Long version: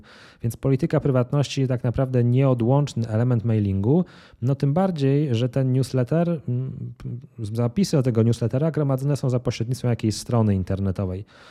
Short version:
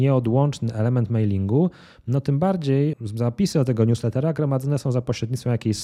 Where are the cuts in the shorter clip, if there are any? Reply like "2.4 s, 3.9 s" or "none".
2.9 s